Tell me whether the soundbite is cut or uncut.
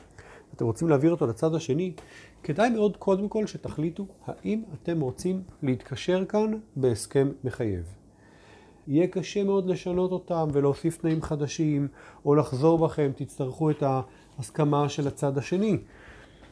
cut